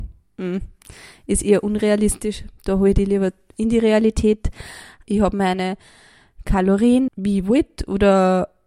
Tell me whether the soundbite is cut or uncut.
cut